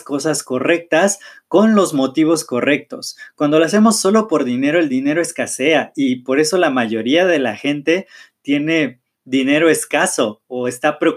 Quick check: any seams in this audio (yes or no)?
no